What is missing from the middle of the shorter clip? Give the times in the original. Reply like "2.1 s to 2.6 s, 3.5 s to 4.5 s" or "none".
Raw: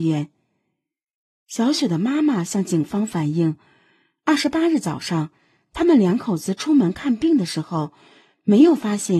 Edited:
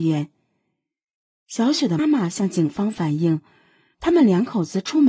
2.0 s to 2.1 s, 4.1 s to 5.7 s